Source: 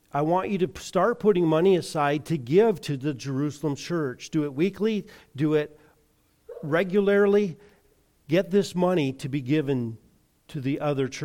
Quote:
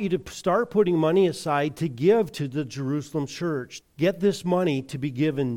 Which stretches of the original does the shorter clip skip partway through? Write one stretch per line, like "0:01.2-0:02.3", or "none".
0:04.3-0:08.1